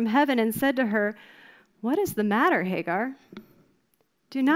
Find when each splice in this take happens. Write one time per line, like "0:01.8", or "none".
none